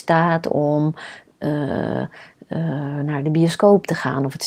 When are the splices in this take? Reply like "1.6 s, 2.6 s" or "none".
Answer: none